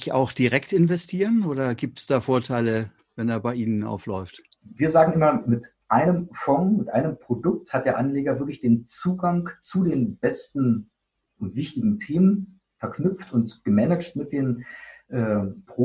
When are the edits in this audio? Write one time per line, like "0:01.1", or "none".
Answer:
0:04.6